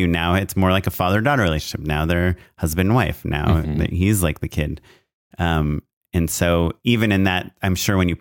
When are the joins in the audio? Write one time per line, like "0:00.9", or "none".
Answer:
0:06.8